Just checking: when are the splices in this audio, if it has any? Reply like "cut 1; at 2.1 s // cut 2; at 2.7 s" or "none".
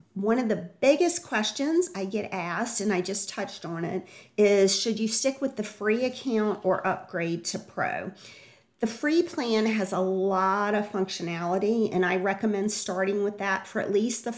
none

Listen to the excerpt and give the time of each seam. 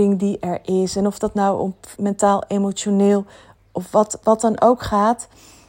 cut 1; at 2.0 s // cut 2; at 4.2 s

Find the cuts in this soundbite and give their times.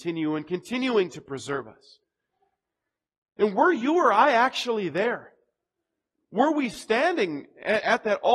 none

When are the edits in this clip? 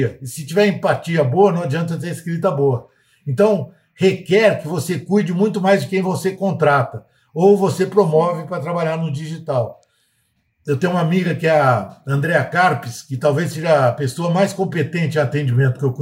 none

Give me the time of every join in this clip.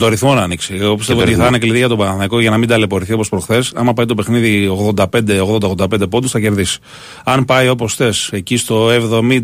none

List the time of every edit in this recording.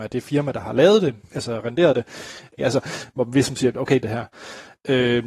cut 1; at 2.6 s // cut 2; at 4.0 s

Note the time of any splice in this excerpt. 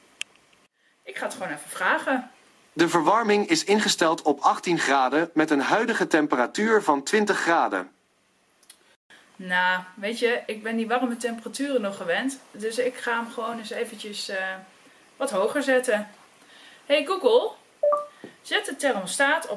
cut 1; at 2.6 s

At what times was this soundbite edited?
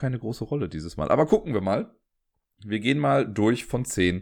none

